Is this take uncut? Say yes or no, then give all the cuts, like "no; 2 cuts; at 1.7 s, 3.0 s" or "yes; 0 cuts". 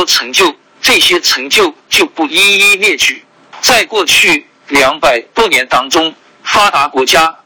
no; 2 cuts; at 3.6 s, 6.3 s